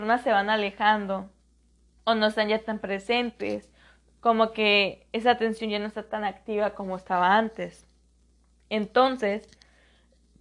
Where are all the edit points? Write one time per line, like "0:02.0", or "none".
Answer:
none